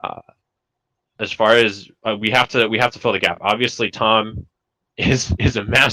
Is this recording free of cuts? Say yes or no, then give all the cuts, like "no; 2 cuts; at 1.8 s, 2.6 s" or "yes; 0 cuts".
yes; 0 cuts